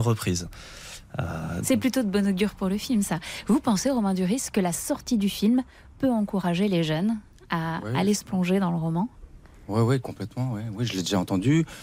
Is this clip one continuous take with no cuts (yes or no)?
yes